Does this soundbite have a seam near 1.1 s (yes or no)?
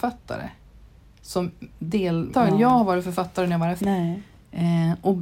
no